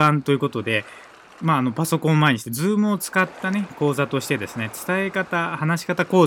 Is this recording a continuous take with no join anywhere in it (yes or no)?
yes